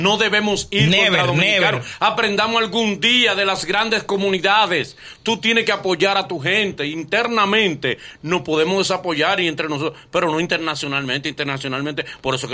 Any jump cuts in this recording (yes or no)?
no